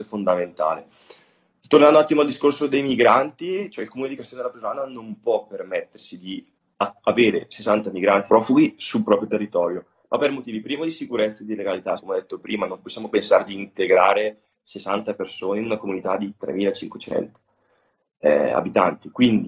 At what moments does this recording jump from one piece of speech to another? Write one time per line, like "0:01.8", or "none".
0:08.3
0:12.0